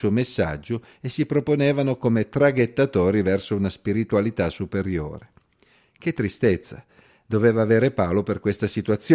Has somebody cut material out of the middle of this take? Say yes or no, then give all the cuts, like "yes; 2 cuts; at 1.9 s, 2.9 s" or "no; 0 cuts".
no; 0 cuts